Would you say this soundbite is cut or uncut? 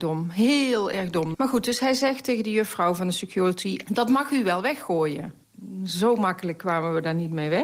cut